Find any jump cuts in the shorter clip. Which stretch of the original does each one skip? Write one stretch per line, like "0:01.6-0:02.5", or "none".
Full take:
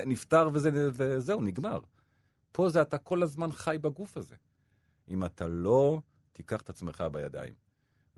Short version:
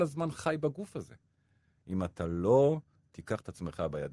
none